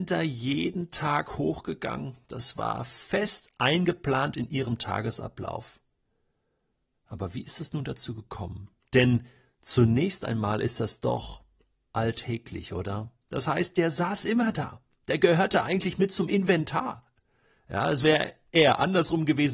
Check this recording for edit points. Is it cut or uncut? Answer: cut